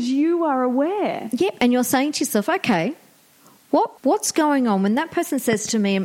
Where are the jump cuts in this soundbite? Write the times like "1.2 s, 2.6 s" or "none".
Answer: 4.0 s